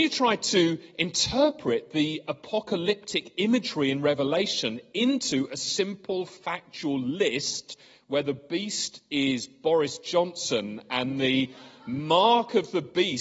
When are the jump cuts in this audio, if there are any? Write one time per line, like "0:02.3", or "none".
none